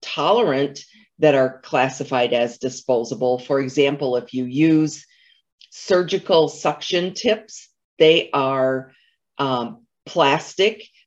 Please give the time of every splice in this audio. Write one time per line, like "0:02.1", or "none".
none

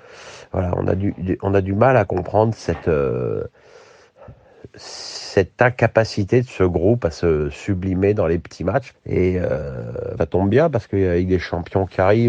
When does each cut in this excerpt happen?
0:08.9
0:10.2

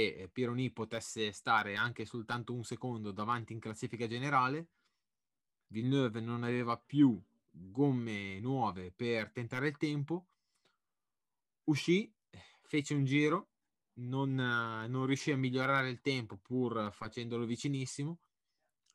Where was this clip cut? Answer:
none

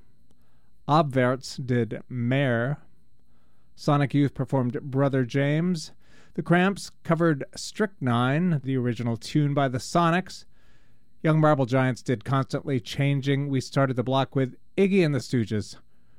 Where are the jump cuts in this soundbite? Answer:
0:08.6

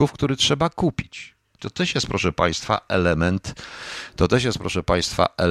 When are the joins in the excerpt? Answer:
0:01.6

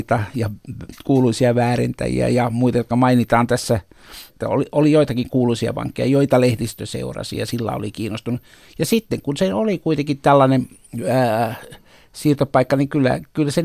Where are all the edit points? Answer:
0:04.3

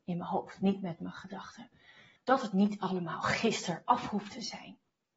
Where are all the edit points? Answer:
0:02.2

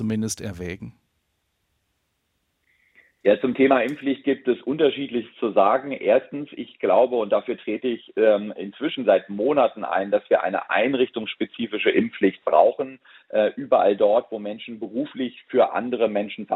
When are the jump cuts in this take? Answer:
none

